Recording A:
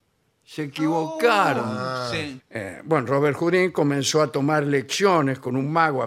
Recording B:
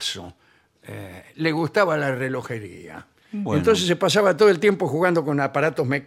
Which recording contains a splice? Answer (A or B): A